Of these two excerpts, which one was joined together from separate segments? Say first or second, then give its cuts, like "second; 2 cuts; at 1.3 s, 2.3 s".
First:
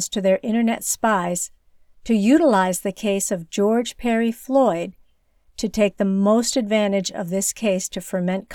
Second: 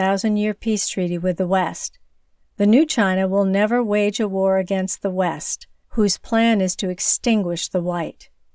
second; 1 cut; at 5.8 s